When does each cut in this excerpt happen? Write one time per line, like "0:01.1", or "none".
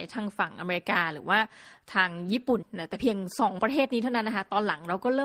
0:02.6

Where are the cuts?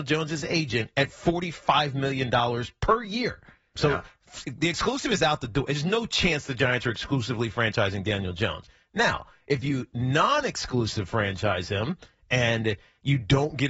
0:03.8

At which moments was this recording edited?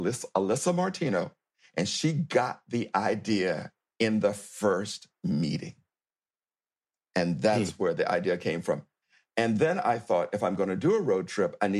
none

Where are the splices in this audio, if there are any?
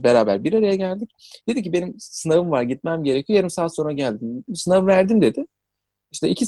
0:04.5

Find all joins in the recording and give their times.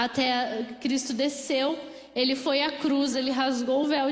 0:03.1

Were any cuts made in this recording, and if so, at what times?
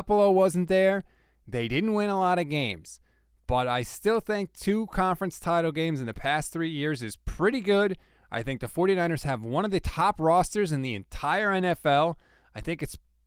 none

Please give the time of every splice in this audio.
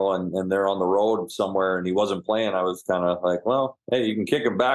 none

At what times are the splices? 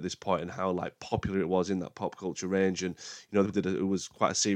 0:03.4

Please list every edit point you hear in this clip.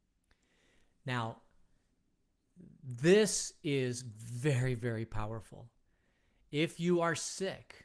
none

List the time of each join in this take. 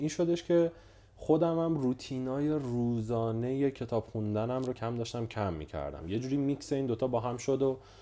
0:04.7

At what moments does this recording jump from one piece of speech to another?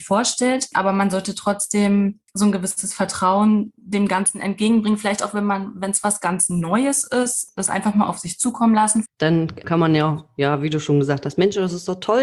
0:09.0

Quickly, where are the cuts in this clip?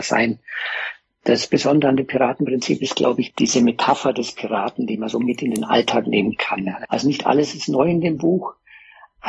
0:06.8

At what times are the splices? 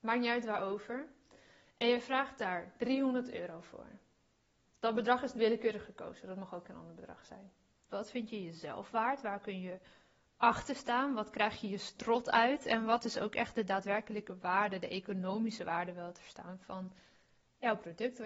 0:05.3
0:07.9

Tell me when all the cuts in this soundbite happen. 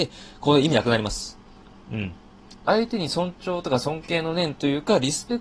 0:02.6

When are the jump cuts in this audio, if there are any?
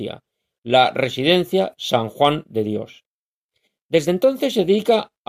none

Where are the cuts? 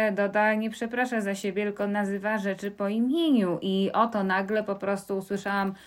none

